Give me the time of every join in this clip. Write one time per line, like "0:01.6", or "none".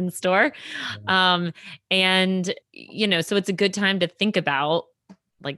0:02.6